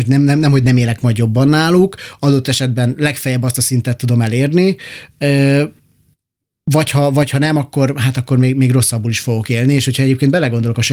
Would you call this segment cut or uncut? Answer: uncut